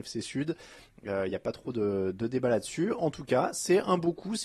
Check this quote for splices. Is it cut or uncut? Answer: uncut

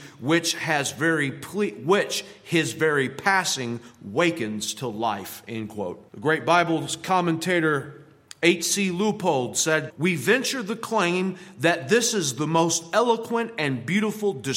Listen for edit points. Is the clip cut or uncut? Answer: cut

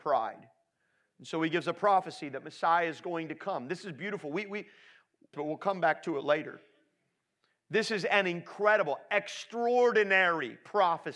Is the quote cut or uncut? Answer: cut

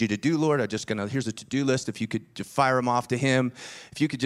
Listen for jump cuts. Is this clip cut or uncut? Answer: uncut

